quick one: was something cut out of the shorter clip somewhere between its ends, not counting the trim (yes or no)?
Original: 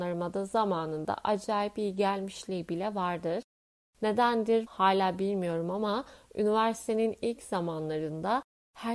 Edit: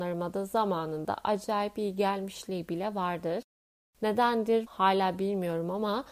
no